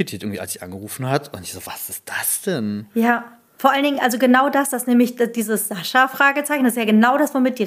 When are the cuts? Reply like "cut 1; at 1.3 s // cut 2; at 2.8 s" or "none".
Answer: none